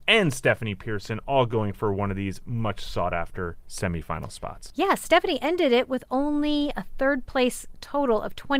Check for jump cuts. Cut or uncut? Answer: cut